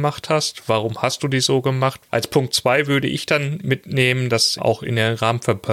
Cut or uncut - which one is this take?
cut